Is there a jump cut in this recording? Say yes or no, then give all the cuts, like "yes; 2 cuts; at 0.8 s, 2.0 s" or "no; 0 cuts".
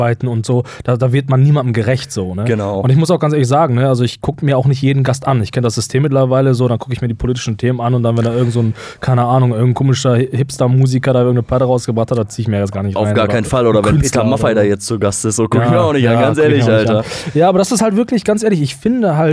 no; 0 cuts